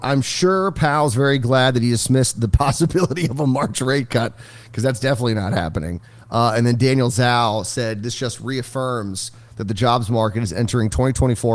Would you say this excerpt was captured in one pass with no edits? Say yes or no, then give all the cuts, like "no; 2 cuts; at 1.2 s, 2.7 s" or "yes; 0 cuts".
yes; 0 cuts